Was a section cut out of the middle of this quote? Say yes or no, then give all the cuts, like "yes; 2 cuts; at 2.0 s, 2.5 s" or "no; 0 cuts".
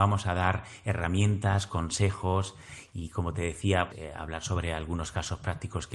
yes; 1 cut; at 3.9 s